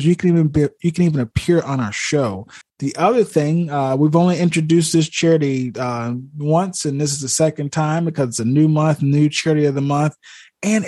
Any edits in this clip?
yes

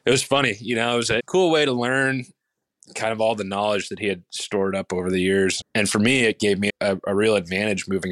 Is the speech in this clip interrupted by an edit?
yes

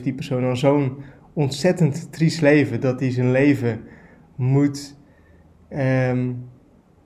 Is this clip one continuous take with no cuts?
yes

